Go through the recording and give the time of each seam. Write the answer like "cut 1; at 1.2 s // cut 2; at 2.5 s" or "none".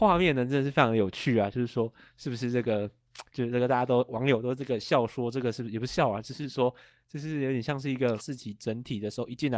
cut 1; at 8.2 s